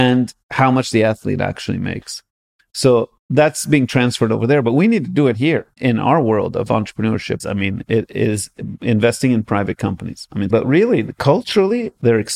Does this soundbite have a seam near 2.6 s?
no; 3 cuts; at 5.8 s, 7.4 s, 10.5 s

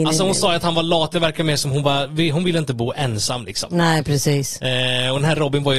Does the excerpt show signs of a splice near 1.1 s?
no; 0 cuts

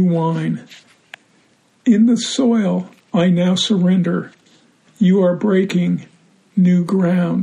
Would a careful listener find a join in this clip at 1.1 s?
no; 0 cuts

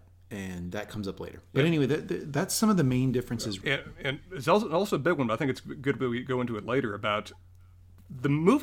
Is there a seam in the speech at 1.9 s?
no; 1 cut; at 3.6 s

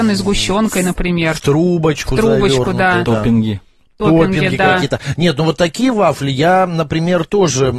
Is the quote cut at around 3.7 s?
no; 0 cuts

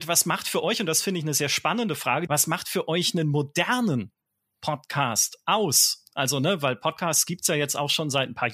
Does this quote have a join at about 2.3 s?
yes; 1 cut; at 2.3 s

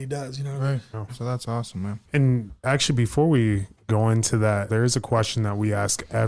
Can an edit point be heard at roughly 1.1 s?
yes; 2 cuts; at 1.1 s, 4.7 s

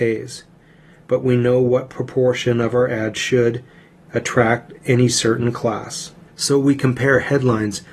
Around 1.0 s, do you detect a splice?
no; 2 cuts; at 4.0 s, 6.3 s

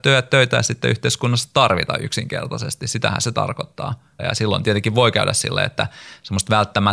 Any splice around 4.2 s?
yes; 1 cut; at 4.2 s

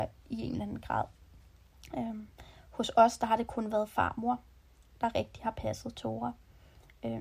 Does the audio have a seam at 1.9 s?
no; 0 cuts

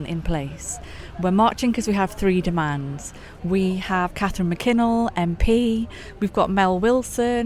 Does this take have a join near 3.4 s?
yes; 1 cut; at 3.4 s

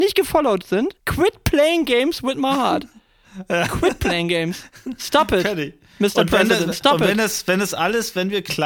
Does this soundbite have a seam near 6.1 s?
no; 1 cut; at 1.0 s

